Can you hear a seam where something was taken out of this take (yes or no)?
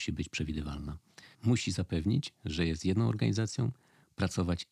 yes